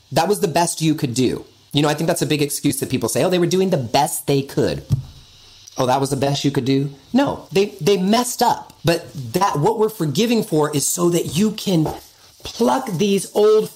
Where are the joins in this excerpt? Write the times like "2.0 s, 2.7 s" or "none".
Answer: 8.8 s